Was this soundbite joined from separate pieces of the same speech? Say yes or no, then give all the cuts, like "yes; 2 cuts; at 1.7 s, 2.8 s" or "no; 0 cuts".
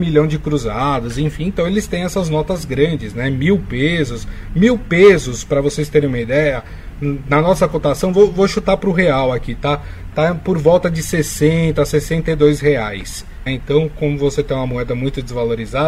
yes; 1 cut; at 13.5 s